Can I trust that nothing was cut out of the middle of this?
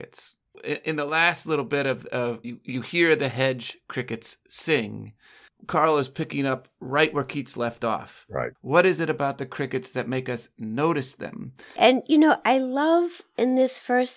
no; 2 cuts; at 2.4 s, 11.8 s

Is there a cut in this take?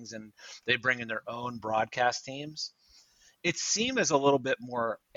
no; 0 cuts

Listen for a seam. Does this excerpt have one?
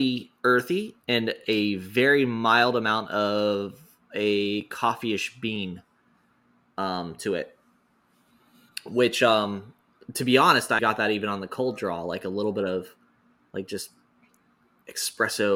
yes; 1 cut; at 10.8 s

